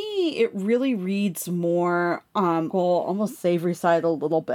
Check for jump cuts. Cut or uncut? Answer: cut